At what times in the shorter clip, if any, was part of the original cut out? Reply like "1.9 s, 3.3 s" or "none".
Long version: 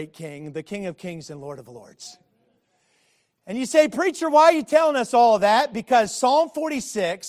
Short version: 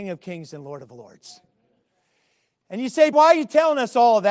3.1 s